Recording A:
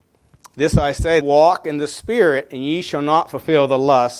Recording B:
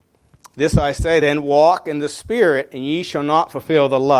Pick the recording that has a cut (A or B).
A